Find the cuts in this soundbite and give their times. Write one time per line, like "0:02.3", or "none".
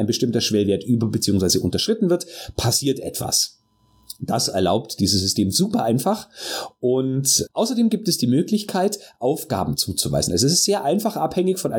none